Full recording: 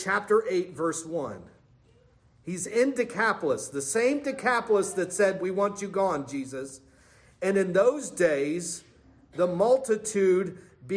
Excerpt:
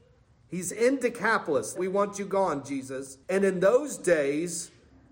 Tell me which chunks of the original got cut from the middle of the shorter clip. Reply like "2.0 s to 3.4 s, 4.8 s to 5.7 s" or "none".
3.7 s to 5.4 s, 6.9 s to 7.4 s

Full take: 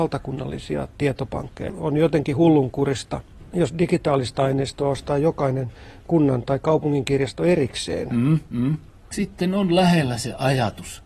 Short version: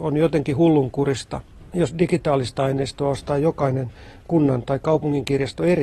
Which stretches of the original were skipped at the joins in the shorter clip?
none

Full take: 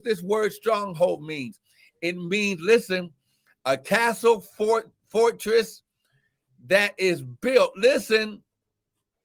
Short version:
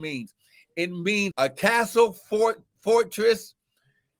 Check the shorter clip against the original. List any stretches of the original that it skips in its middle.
2.6 s to 3.6 s

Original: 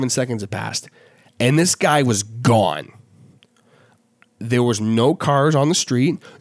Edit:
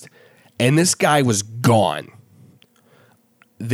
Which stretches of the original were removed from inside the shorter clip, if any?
none

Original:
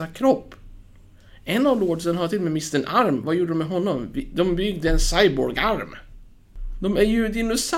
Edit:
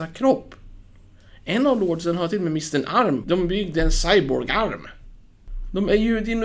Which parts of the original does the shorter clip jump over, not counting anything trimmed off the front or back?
3.2 s to 4.3 s

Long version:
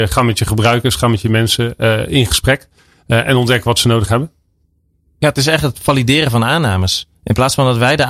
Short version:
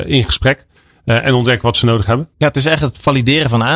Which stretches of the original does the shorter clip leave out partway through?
4.3 s to 5.1 s

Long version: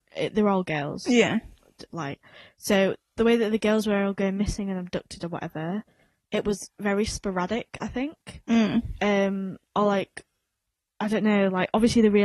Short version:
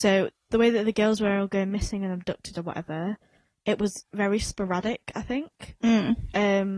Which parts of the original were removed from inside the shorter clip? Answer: none

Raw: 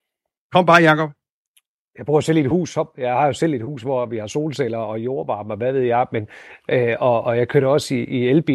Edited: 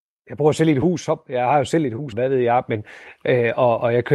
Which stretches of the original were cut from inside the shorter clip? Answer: 3.8 s to 5.6 s

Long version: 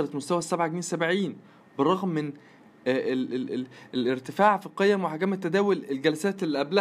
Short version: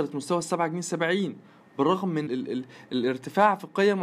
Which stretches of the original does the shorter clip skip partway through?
2.3 s to 3.3 s

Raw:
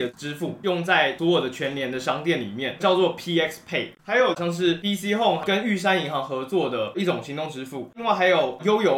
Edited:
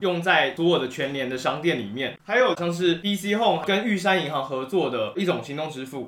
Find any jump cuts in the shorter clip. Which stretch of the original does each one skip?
2.8 s to 4.0 s

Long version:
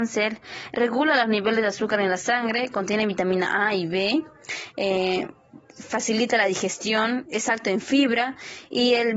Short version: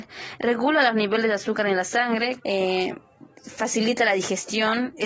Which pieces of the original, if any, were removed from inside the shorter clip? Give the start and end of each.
2.7 s to 4.7 s

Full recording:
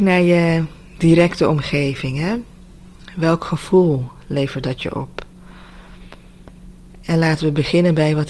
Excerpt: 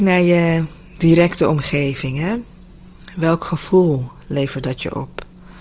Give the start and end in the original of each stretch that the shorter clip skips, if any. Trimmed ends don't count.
none

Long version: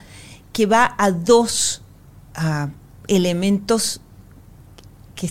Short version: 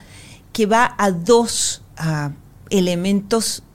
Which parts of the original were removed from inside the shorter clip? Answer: 1.9 s to 2.2 s

